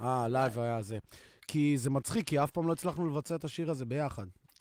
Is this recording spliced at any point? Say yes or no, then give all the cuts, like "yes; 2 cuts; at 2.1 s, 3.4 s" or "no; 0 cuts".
no; 0 cuts